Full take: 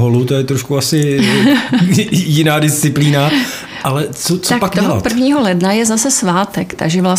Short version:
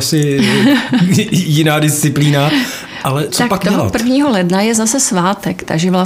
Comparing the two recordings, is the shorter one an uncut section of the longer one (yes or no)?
no